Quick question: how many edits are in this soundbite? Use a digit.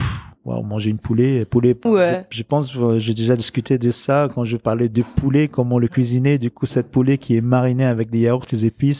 1